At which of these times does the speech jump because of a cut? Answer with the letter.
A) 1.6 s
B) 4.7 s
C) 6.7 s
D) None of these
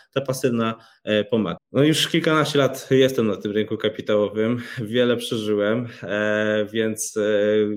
A